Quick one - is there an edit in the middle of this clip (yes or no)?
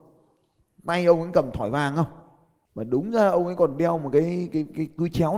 no